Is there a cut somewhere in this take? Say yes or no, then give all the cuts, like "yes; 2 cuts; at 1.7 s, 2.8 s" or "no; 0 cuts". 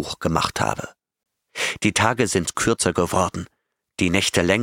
yes; 1 cut; at 1.8 s